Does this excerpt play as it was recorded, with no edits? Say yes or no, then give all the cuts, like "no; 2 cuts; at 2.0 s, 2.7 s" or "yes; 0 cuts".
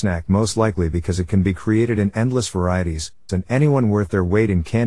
no; 1 cut; at 3.3 s